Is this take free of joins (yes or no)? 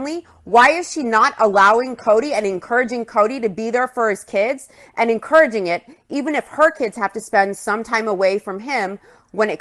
yes